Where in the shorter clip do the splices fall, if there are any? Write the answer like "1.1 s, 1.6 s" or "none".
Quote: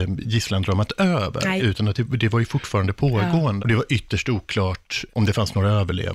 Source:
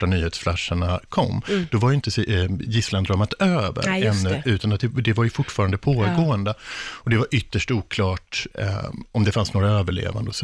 1.6 s, 3.6 s, 5.1 s